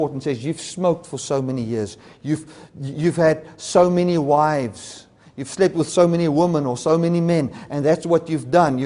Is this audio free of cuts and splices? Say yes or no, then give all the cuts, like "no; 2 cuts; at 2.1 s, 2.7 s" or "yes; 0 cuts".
no; 1 cut; at 2.2 s